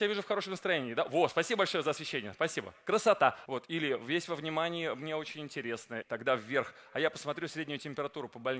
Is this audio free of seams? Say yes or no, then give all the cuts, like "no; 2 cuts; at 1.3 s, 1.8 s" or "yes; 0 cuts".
no; 2 cuts; at 3.5 s, 6.0 s